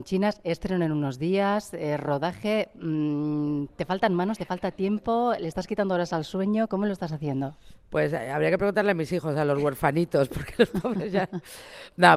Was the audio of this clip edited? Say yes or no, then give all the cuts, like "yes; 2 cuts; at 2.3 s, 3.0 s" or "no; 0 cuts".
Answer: no; 0 cuts